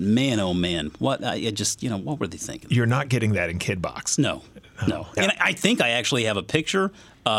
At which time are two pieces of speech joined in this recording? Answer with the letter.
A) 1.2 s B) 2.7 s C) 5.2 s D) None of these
C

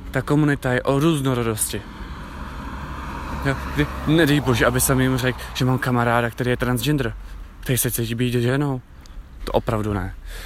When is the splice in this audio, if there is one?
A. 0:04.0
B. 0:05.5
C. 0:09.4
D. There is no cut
C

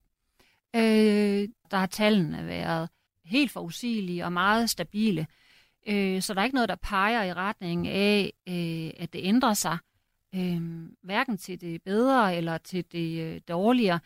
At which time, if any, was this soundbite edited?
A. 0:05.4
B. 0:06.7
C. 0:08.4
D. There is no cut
D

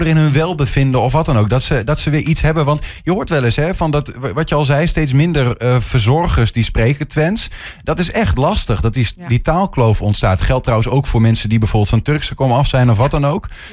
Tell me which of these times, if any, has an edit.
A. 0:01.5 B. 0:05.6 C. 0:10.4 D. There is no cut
D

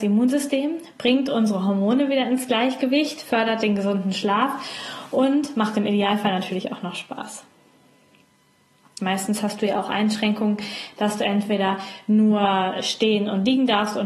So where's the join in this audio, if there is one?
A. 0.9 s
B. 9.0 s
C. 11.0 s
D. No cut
B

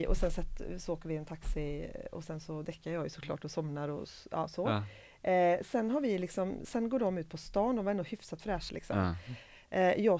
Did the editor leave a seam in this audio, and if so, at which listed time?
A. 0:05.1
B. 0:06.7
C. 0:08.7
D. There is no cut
C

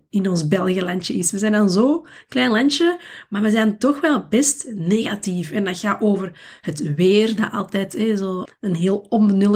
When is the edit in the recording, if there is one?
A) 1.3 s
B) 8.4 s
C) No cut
B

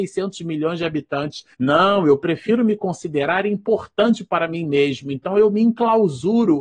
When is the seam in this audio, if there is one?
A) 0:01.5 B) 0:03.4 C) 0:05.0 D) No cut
A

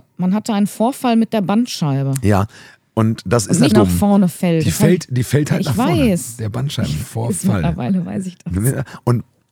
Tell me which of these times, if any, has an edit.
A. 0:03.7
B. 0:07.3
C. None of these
A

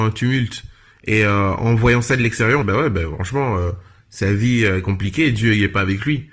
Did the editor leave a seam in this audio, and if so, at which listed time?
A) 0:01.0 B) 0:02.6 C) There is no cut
B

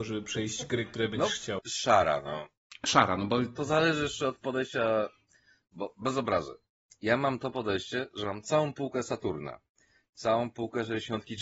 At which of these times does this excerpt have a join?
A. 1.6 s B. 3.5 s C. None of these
A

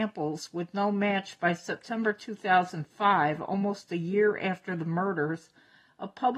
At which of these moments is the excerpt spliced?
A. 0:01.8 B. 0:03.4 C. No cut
C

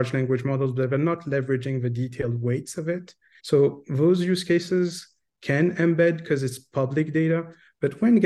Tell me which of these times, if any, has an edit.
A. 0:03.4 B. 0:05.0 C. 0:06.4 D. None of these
A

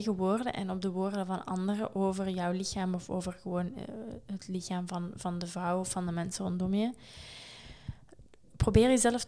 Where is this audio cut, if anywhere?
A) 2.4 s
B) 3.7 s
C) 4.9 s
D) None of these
D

